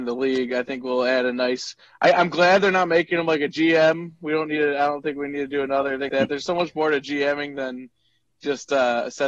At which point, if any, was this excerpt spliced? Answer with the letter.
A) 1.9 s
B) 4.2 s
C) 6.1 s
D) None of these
C